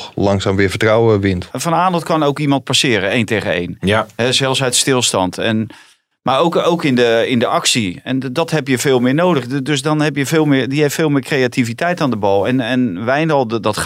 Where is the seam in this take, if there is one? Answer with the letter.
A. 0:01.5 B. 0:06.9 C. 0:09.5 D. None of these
A